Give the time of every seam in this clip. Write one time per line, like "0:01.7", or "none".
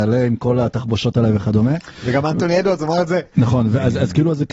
0:03.3